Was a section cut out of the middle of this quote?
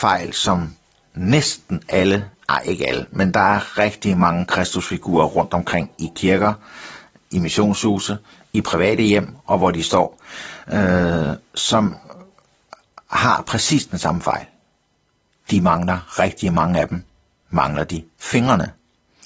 no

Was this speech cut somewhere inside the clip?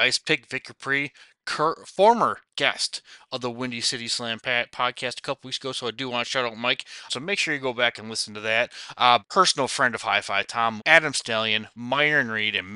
yes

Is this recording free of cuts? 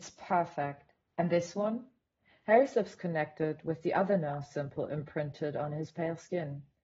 yes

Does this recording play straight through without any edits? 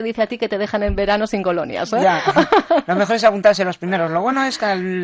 yes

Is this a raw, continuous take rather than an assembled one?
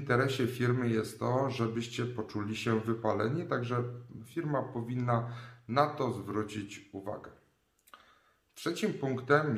yes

